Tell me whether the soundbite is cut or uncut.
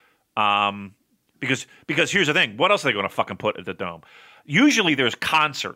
uncut